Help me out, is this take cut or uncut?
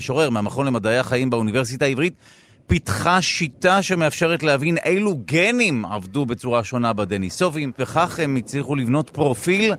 cut